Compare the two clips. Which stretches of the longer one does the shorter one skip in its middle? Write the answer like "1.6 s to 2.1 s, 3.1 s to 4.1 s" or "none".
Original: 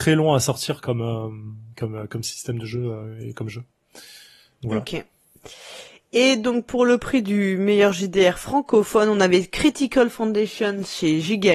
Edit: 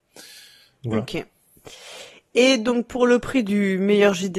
none